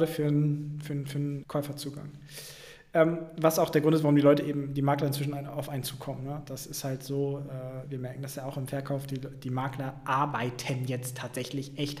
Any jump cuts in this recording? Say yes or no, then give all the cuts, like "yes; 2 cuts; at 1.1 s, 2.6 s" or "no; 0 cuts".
yes; 1 cut; at 1.4 s